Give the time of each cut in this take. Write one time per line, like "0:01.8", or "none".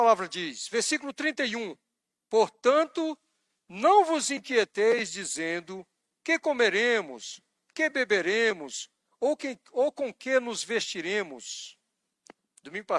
none